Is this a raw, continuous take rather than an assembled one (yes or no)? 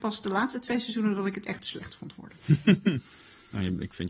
yes